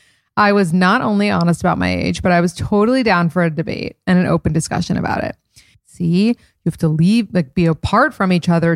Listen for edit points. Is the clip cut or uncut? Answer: cut